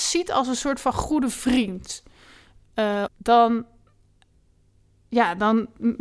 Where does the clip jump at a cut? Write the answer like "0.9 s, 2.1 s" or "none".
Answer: 3.1 s